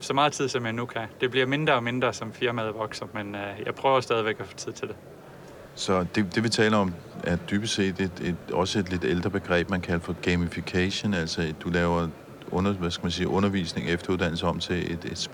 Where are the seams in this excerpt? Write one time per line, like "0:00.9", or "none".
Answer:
none

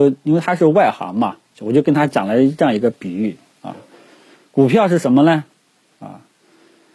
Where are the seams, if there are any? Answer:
0:01.5

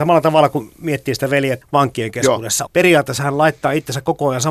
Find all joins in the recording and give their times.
0:01.6
0:02.7

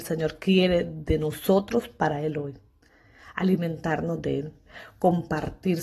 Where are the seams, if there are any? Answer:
none

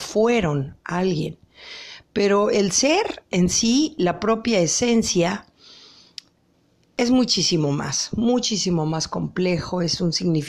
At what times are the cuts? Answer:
none

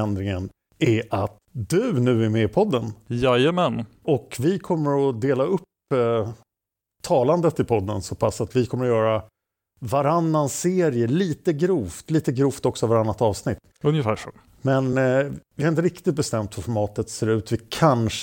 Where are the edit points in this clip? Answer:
none

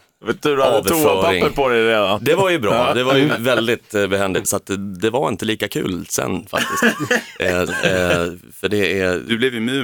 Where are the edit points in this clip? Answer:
0:04.4
0:07.7

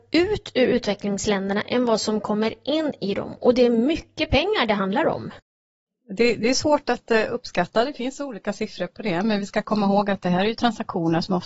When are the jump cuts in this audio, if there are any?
none

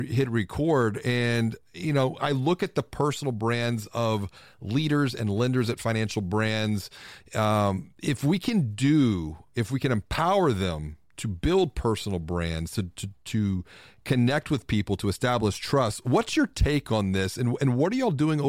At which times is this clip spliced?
none

